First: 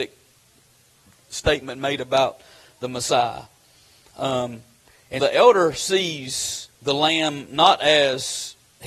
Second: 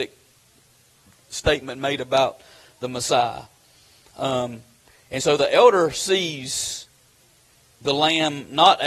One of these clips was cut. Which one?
first; 2 cuts; at 5.2 s, 6.7 s

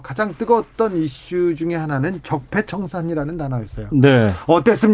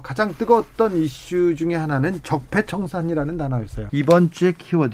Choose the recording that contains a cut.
second; 1 cut; at 3.9 s

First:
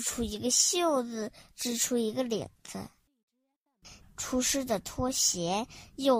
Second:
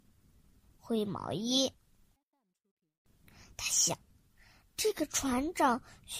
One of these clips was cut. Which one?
first; 1 cut; at 4.0 s

